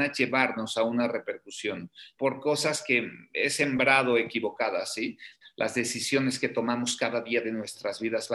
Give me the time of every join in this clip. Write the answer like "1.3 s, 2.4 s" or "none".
2.2 s, 5.4 s